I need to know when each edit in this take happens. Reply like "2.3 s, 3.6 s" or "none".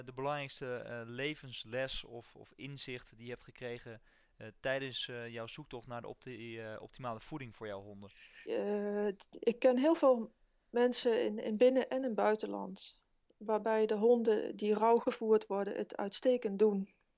8.5 s